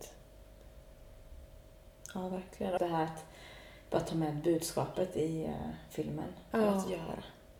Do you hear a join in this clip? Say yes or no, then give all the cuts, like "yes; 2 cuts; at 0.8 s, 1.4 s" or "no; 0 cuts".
yes; 2 cuts; at 2.8 s, 6.5 s